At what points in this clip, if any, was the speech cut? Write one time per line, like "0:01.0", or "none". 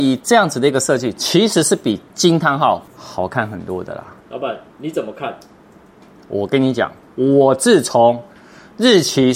0:04.2